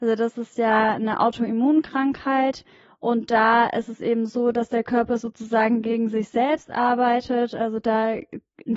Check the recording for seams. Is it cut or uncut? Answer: uncut